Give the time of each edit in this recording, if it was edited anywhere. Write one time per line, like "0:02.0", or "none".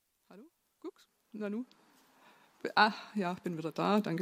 none